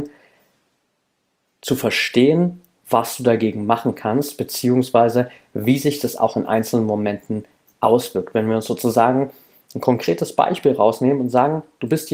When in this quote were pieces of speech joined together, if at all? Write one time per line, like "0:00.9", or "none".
none